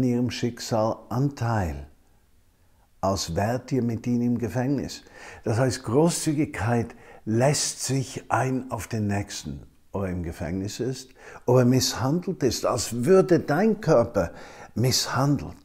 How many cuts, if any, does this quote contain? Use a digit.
0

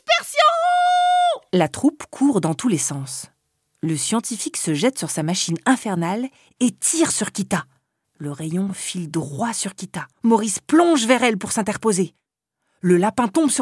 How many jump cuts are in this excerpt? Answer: 2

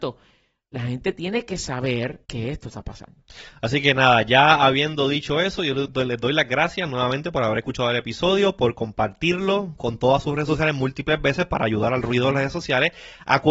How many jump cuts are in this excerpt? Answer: 2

